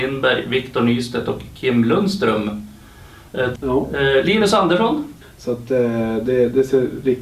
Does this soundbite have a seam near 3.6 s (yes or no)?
yes